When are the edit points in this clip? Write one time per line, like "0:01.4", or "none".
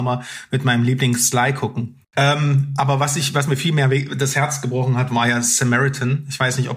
0:02.0